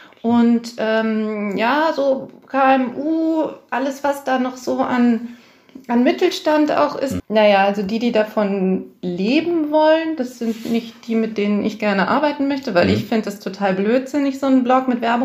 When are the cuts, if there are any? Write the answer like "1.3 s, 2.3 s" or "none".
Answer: 7.2 s